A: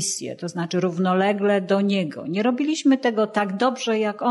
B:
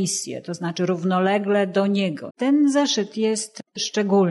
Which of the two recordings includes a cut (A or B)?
B